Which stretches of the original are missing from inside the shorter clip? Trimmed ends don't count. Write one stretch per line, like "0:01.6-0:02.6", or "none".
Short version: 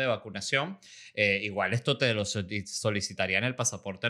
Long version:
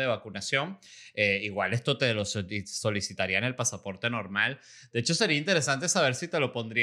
none